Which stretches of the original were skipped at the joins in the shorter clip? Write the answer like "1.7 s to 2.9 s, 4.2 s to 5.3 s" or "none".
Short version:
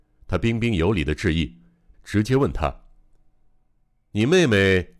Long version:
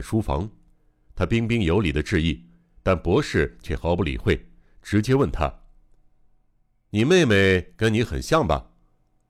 2.8 s to 4.7 s